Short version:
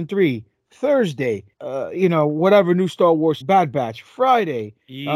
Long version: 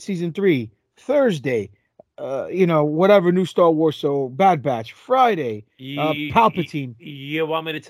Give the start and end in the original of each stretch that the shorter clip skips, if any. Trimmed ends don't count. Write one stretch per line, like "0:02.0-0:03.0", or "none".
0:01.8-0:02.1
0:04.0-0:04.3